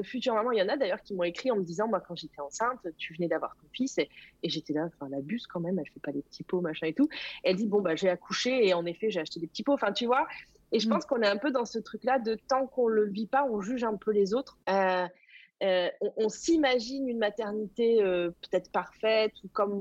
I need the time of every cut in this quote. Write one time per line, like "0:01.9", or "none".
0:14.6